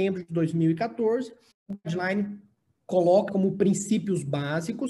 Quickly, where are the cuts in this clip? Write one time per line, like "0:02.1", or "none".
0:01.5
0:03.3